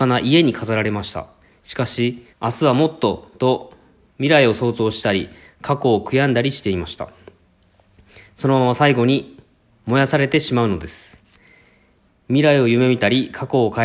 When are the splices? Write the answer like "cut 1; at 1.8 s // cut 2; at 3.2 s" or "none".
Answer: cut 1; at 2.3 s